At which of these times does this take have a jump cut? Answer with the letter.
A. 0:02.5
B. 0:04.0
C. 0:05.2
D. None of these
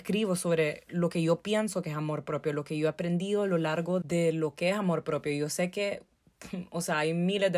B